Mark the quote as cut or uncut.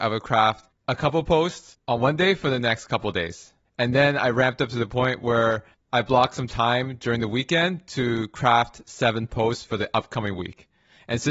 uncut